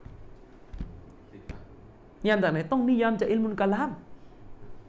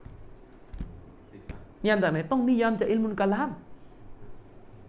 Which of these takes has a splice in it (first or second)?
second